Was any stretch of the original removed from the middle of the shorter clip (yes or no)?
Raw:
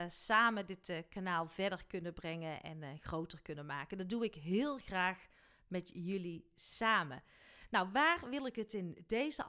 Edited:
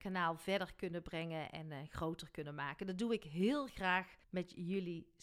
yes